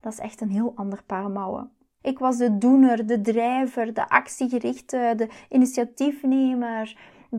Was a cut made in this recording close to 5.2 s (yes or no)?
no